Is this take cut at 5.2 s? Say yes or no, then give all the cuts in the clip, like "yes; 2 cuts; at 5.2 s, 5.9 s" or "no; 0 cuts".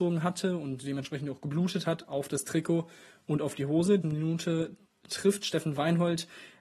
no; 1 cut; at 4.0 s